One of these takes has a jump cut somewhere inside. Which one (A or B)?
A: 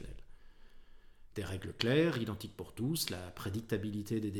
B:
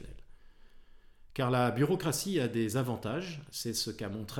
A